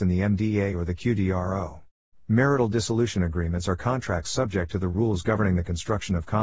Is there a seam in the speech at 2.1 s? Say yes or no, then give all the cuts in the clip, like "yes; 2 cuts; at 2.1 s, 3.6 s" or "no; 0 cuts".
yes; 1 cut; at 2.1 s